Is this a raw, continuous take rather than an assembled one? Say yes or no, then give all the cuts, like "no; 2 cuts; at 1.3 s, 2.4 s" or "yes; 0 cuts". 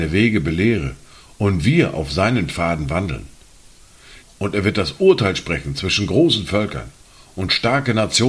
no; 1 cut; at 4.2 s